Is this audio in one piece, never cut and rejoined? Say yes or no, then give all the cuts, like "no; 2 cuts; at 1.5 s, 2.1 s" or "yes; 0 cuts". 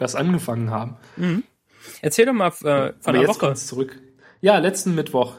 yes; 0 cuts